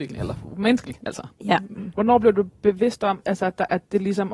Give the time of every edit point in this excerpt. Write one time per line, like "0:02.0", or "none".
0:01.9
0:03.2